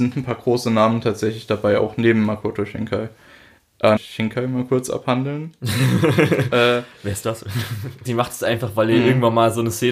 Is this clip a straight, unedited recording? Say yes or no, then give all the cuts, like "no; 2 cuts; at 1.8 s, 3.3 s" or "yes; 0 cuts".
no; 2 cuts; at 4.0 s, 8.0 s